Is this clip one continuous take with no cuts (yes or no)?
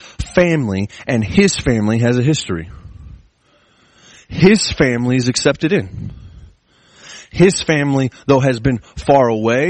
yes